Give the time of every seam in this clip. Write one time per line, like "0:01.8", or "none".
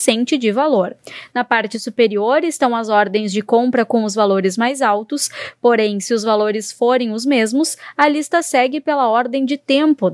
none